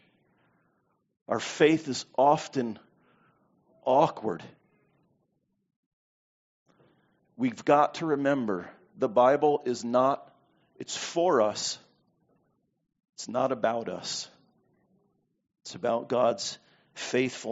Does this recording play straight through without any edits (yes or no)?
yes